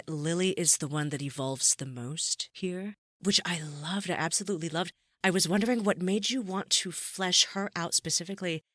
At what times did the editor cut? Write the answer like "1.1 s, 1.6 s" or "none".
none